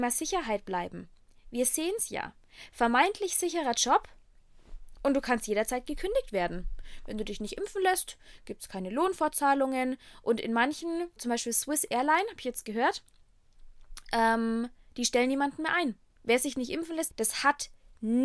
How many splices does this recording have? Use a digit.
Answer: 3